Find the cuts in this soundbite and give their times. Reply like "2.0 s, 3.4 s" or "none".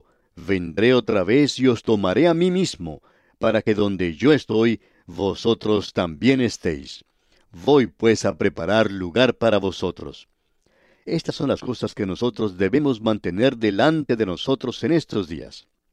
none